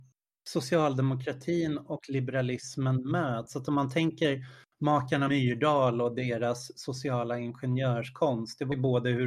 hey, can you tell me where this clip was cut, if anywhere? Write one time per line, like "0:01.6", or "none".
none